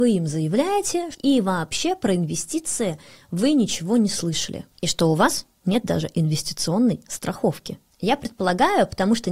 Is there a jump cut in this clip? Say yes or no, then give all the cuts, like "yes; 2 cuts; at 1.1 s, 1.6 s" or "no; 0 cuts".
yes; 1 cut; at 1.1 s